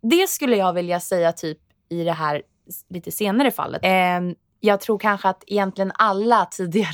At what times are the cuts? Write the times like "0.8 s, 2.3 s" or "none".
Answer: 3.8 s